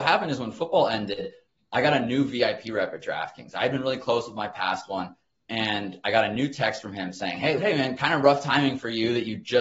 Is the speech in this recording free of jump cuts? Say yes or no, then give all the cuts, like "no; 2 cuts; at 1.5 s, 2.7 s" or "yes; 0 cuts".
no; 1 cut; at 7.6 s